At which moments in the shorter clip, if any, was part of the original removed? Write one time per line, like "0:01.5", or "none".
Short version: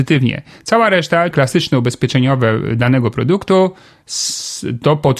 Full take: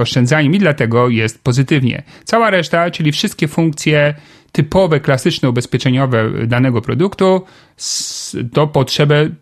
0:01.3